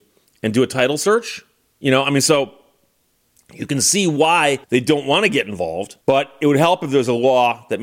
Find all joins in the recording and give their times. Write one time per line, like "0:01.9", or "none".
0:04.6
0:06.0